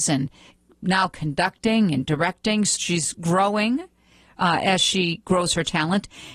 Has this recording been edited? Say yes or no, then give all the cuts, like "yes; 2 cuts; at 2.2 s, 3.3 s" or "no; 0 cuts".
yes; 1 cut; at 2.8 s